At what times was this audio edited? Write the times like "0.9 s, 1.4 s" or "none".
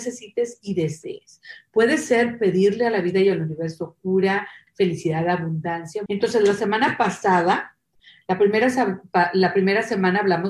4.7 s, 6.1 s